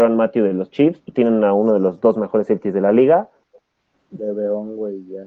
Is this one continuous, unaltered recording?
no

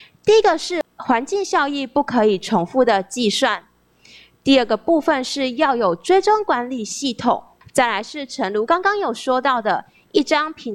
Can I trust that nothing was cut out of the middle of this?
yes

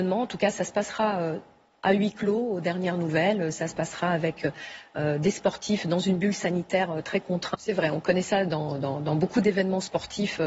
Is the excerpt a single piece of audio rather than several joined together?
no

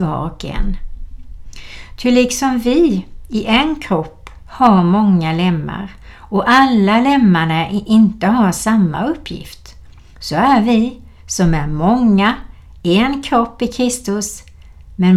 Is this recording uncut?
yes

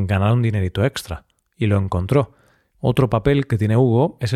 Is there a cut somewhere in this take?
yes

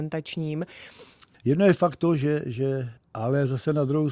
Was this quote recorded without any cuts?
no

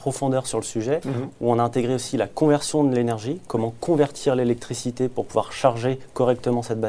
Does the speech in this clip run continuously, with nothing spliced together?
yes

